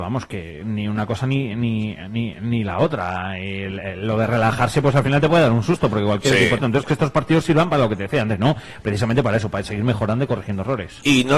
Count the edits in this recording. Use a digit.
1